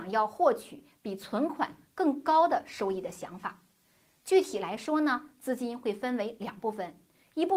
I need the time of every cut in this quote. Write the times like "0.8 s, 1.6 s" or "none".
none